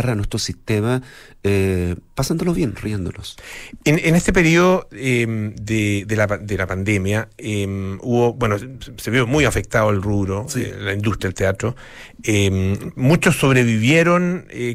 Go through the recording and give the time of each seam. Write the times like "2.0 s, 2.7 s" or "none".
none